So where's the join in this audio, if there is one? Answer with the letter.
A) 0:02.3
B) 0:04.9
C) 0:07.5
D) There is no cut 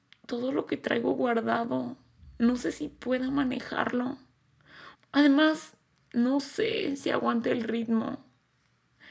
B